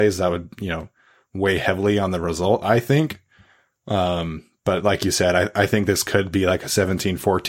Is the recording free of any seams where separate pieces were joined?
yes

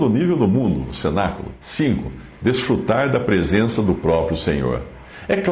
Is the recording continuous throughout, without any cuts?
no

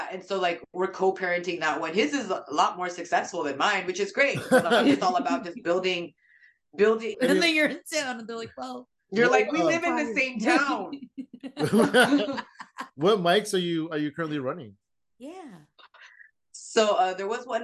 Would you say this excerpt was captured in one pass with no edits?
no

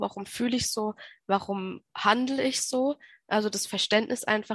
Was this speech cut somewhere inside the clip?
no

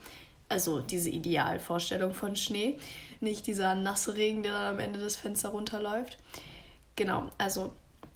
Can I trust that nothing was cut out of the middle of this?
yes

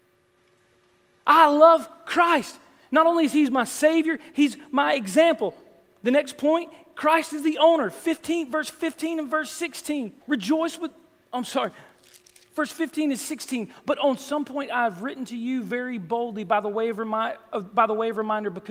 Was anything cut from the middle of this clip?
yes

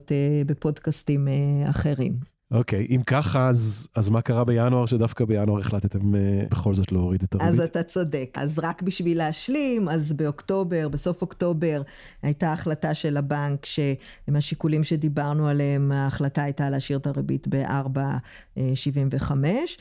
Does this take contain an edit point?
no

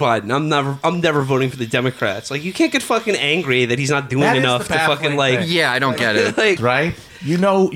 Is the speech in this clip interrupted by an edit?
yes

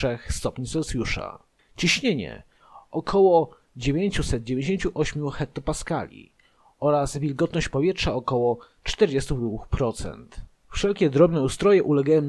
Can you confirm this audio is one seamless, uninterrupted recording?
no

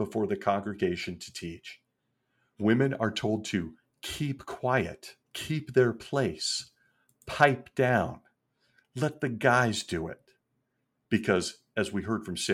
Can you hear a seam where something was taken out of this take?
yes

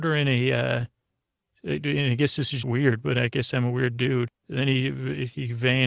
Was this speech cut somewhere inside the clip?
yes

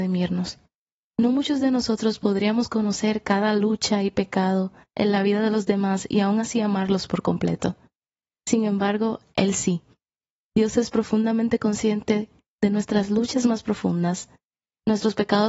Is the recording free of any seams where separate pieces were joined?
yes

